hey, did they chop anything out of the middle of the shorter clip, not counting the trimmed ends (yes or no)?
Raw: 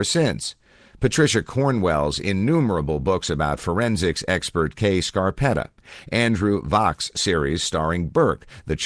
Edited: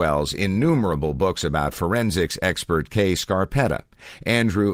no